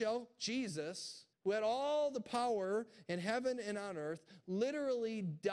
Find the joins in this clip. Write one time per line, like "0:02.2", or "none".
0:01.3